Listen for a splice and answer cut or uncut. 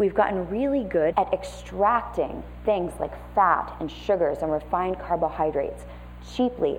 cut